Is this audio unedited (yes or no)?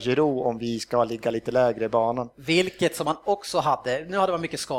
yes